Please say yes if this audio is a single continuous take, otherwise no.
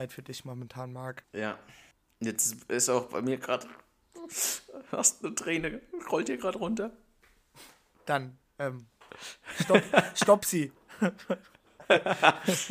no